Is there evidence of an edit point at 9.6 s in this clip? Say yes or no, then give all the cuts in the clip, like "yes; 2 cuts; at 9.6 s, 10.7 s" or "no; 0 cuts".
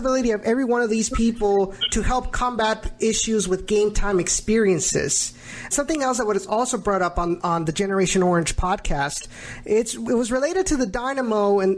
no; 1 cut; at 5.7 s